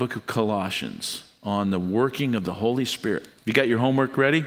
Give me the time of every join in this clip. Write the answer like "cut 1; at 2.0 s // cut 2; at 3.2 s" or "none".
cut 1; at 3.4 s